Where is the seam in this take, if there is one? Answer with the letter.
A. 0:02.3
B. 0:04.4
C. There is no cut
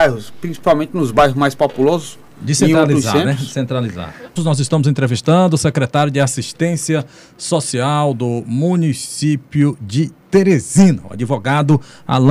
B